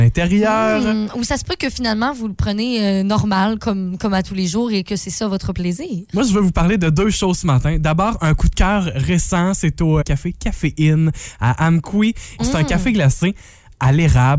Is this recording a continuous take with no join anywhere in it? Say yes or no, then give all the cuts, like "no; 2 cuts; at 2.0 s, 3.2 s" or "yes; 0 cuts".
no; 2 cuts; at 10.0 s, 12.4 s